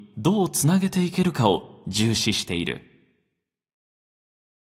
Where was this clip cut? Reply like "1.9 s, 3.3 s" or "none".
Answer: none